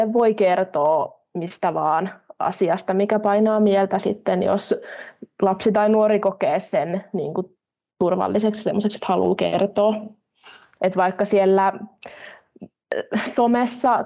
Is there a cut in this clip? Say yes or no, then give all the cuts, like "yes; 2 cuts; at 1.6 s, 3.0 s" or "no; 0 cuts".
yes; 1 cut; at 10.8 s